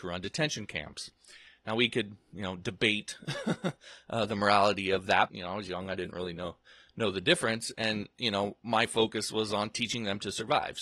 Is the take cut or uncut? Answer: cut